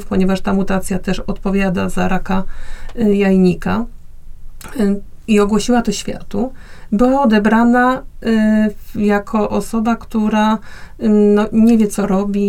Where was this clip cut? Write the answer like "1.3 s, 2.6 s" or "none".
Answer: none